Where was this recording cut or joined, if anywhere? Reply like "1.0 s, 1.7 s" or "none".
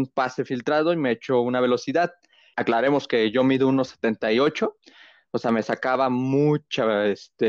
2.5 s

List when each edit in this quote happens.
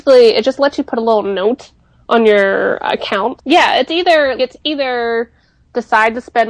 3.4 s, 4.4 s

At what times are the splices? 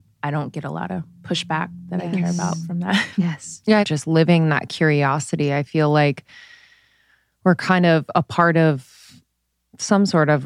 3.8 s

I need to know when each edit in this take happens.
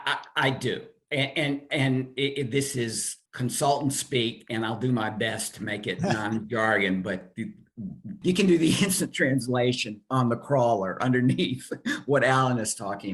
3.3 s, 8.2 s

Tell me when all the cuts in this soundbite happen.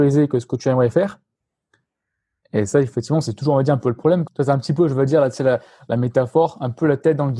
4.3 s

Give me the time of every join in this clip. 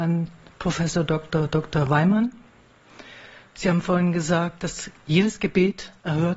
none

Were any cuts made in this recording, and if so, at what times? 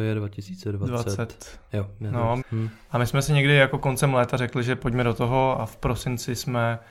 2.4 s

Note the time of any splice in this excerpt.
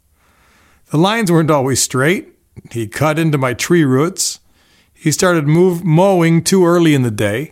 none

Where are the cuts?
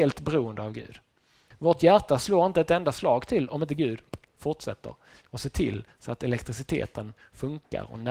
1.5 s

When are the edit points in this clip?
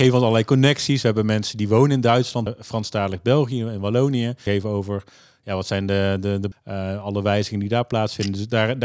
2.5 s, 4.5 s, 6.5 s

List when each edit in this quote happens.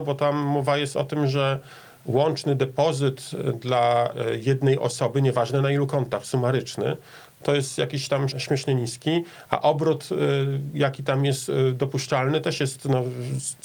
8.3 s

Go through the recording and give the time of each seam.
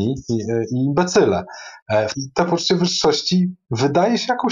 2.1 s

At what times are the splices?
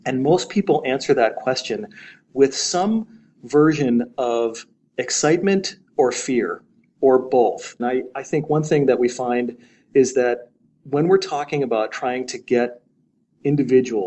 7.8 s

